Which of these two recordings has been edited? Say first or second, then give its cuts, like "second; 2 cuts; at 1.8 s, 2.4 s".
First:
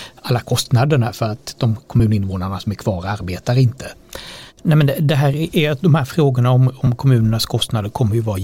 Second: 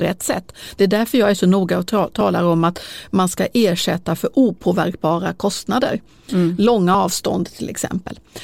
first; 1 cut; at 4.5 s